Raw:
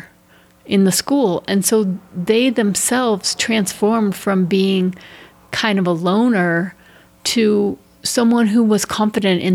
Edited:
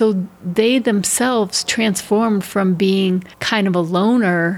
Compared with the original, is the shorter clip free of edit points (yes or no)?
no